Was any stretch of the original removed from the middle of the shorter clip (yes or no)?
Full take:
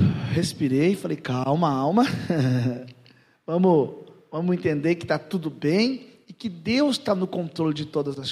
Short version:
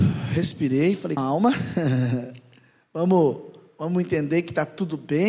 yes